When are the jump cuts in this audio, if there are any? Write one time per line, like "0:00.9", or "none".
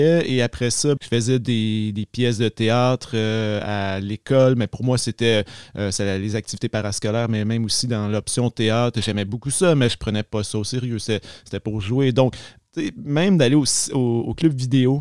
0:01.0